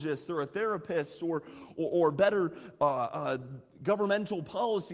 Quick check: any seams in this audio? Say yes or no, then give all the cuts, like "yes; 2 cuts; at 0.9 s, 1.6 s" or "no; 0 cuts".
no; 0 cuts